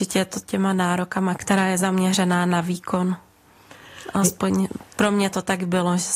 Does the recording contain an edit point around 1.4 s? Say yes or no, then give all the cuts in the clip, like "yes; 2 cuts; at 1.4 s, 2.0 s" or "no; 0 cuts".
yes; 1 cut; at 1.4 s